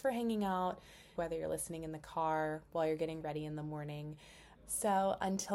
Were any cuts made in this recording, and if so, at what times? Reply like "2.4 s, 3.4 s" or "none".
1.2 s, 4.5 s